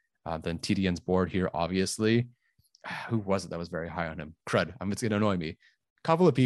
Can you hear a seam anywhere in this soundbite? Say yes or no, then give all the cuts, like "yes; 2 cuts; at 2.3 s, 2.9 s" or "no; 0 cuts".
no; 0 cuts